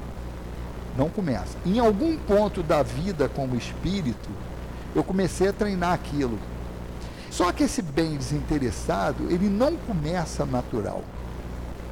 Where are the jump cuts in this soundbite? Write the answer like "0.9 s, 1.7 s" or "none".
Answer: 7.3 s